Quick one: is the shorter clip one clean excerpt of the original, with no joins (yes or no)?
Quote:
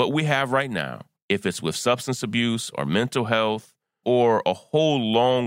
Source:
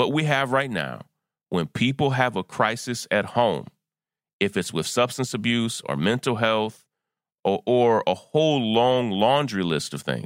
no